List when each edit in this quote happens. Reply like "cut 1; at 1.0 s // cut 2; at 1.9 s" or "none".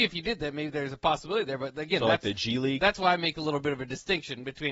none